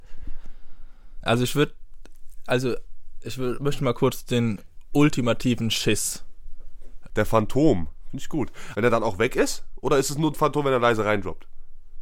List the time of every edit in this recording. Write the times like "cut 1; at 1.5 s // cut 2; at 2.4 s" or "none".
cut 1; at 1.2 s // cut 2; at 7.1 s // cut 3; at 8.7 s